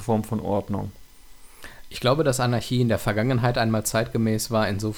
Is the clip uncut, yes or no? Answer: yes